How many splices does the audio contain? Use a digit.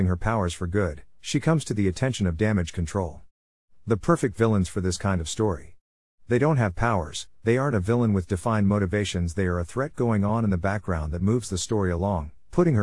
0